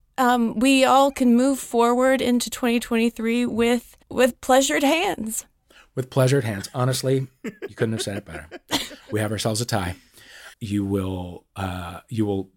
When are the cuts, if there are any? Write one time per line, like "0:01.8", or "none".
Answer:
0:04.0
0:10.5

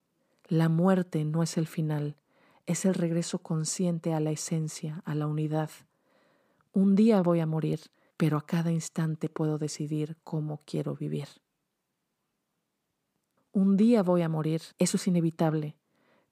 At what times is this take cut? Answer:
0:08.1
0:13.4
0:14.7

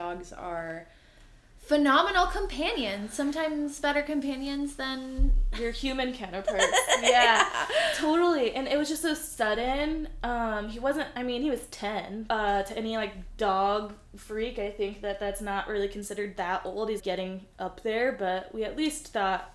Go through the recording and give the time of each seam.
0:12.3
0:17.0

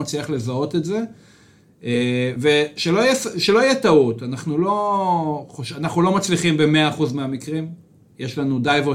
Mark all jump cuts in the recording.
none

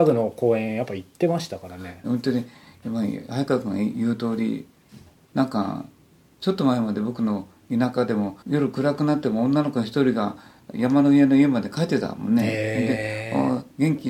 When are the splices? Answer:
0:02.0
0:08.4

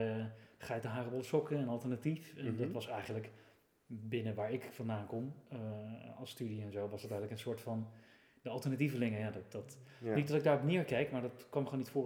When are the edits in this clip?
none

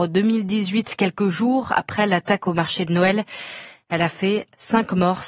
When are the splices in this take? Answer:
none

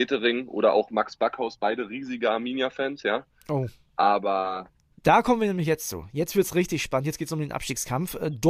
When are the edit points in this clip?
0:04.9

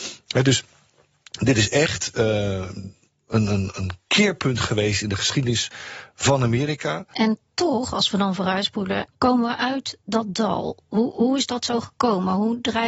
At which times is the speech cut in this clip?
0:09.1

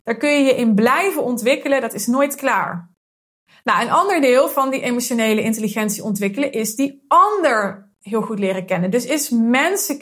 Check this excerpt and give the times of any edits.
none

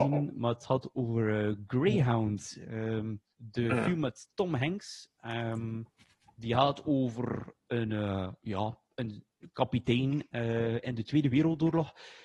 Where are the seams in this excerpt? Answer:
0:03.3

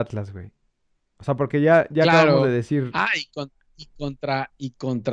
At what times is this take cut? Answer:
none

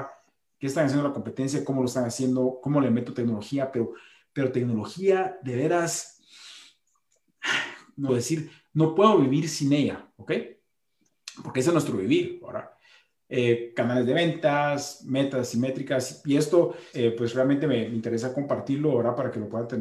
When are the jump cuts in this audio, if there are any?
0:08.1
0:16.9

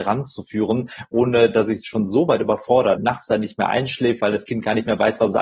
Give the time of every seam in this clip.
0:03.0

